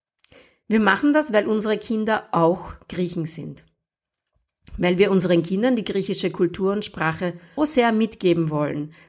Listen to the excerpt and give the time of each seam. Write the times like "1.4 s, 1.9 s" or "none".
7.6 s

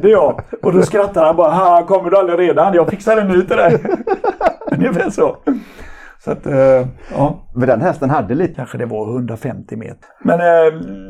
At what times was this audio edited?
8.5 s, 10.0 s

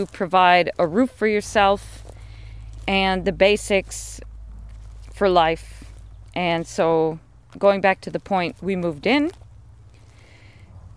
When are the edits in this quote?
8.6 s

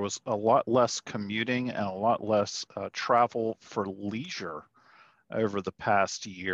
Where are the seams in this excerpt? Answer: none

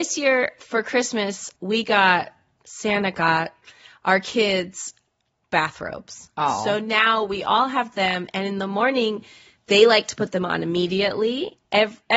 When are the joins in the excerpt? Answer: 1.6 s

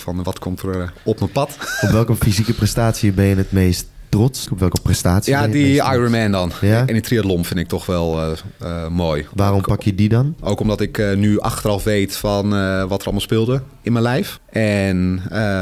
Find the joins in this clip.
4.5 s

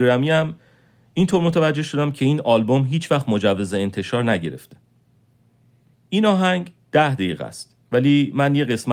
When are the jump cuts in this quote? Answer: 5.9 s

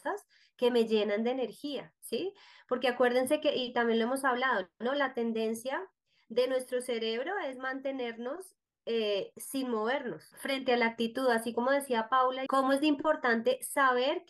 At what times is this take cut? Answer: 10.3 s, 12.5 s

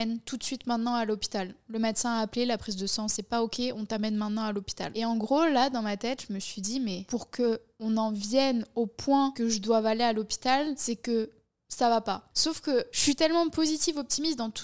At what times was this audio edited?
12.3 s

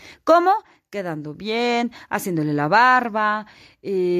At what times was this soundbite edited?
none

